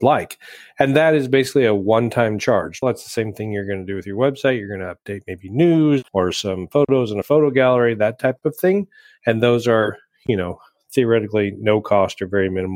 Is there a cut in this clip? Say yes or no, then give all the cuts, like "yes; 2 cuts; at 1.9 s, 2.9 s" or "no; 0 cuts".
yes; 2 cuts; at 2.8 s, 6.1 s